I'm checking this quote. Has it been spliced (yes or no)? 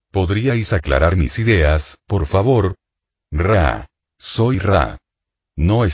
no